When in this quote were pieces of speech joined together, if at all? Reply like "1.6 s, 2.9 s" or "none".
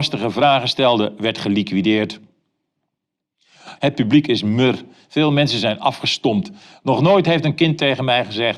3.8 s, 6.7 s